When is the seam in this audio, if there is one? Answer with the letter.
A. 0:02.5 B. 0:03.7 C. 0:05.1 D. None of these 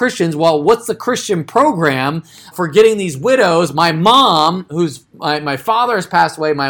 A